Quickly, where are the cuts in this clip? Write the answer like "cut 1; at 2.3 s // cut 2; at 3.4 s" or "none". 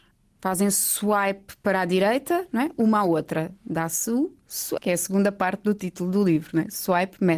cut 1; at 4.8 s